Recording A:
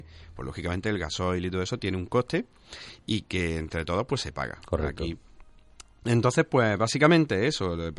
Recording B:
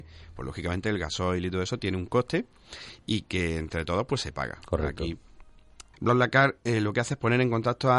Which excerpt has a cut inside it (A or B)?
B